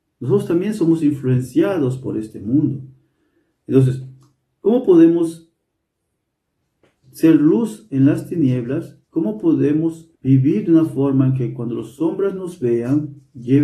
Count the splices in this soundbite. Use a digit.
2